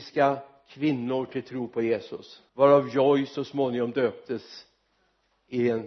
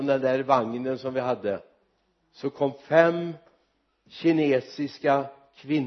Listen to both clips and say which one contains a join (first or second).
first